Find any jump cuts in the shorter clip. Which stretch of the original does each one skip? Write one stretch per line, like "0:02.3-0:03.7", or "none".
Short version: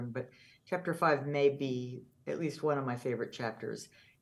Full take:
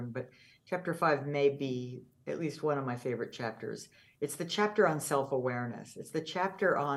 none

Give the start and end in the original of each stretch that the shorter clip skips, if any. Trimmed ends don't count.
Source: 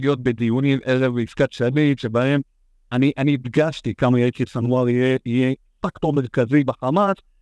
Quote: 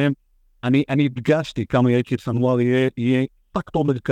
none

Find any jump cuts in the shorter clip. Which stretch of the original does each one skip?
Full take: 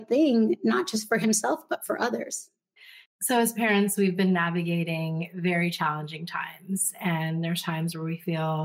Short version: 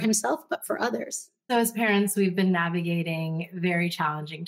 0:02.7-0:03.3

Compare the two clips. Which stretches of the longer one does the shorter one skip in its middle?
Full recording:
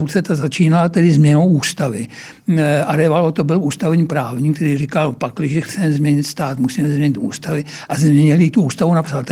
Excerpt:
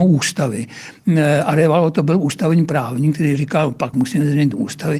0:05.3-0:06.6

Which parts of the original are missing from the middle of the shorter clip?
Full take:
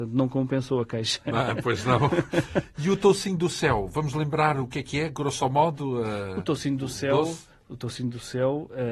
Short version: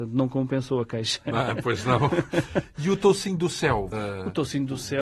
0:03.9-0:06.0

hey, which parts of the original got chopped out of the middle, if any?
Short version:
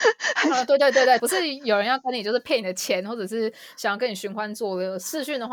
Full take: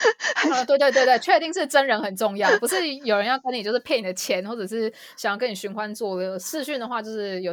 0:01.2-0:02.6

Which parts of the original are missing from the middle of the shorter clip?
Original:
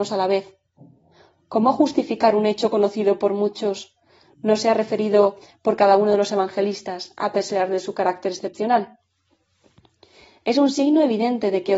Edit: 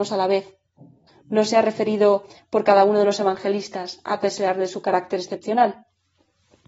0:01.1-0:04.2

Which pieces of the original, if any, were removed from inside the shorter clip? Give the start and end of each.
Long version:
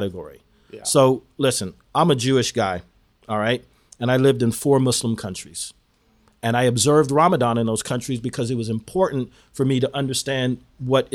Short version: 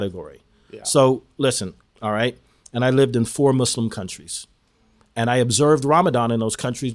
0:01.8-0:03.1

